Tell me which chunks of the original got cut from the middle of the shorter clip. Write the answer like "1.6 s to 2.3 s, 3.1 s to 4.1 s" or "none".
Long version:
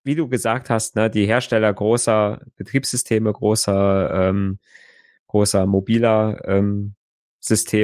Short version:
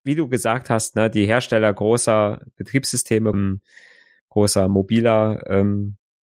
3.3 s to 4.3 s

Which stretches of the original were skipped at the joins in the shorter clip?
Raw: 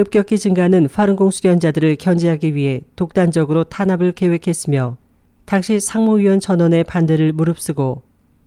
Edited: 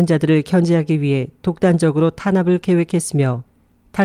none

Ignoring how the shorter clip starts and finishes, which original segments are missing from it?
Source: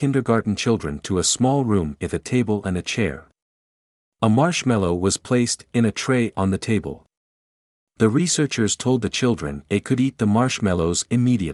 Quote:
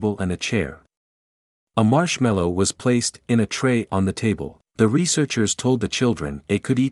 7.1 s to 7.9 s

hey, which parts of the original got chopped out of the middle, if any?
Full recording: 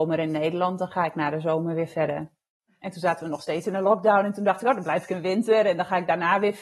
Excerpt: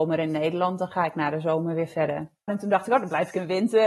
2.5 s to 4.2 s

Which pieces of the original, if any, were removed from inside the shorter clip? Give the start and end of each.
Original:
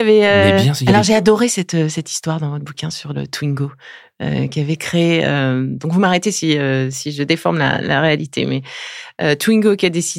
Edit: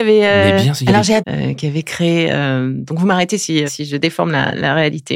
1.2 s to 4.1 s, 6.6 s to 6.9 s

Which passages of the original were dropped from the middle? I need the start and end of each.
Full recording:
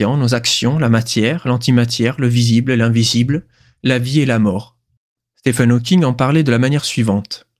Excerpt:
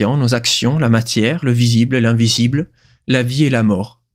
1.4 s to 2.2 s

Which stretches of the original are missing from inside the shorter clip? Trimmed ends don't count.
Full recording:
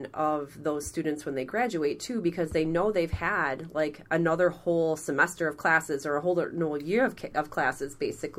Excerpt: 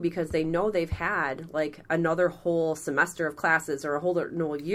none

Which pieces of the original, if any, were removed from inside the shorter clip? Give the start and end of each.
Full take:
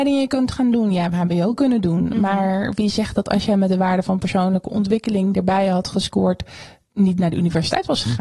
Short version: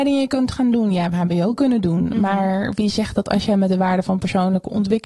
none

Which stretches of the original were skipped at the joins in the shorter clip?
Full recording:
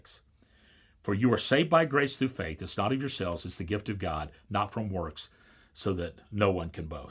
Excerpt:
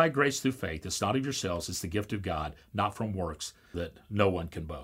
5.5 s to 6.0 s

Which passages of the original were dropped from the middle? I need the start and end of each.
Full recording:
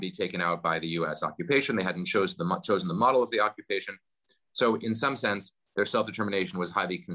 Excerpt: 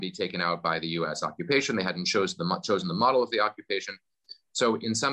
none

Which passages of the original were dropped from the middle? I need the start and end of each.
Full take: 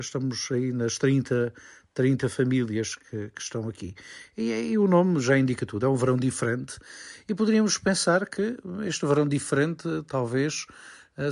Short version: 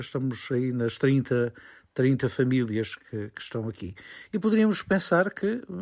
4.3 s to 7.2 s

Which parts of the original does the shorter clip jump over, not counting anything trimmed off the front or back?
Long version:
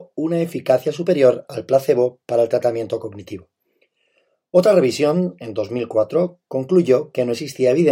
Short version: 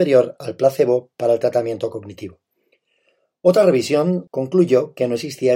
5.4 s to 6.4 s

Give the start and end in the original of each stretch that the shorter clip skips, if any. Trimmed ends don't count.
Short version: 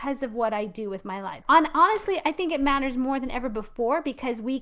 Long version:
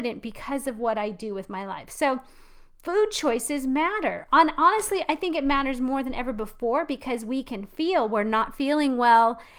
1.9 s to 4.3 s

